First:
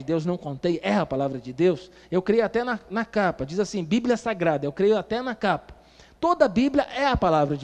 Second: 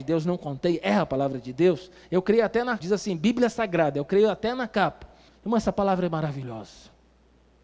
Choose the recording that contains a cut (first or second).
second